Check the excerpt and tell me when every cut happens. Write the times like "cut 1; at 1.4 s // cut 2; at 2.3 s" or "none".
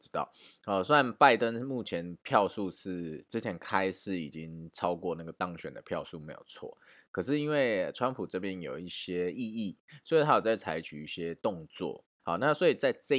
cut 1; at 12.2 s